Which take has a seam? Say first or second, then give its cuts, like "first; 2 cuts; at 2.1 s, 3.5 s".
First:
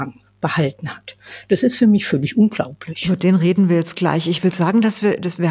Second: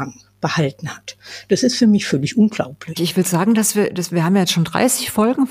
second; 1 cut; at 3.0 s